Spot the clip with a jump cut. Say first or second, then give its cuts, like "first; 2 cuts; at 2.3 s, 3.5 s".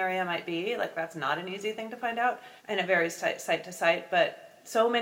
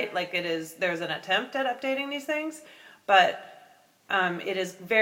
first; 1 cut; at 2.6 s